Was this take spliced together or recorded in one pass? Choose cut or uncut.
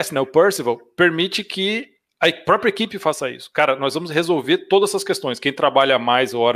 uncut